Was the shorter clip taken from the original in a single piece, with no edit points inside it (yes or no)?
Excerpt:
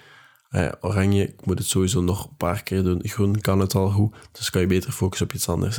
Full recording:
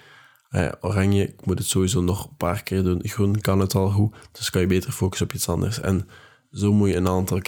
yes